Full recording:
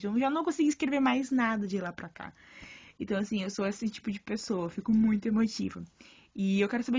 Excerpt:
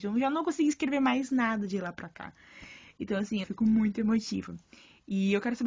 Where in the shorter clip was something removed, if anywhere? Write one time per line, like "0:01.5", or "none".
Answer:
0:03.4